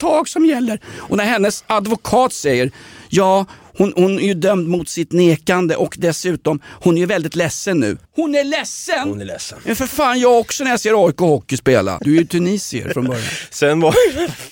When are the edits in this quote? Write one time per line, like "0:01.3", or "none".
0:08.1
0:12.0